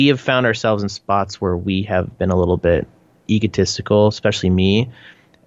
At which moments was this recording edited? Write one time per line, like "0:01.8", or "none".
none